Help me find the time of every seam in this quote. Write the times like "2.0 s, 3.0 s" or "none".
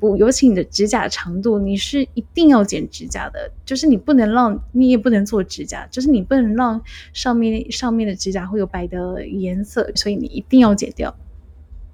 8.7 s, 10.0 s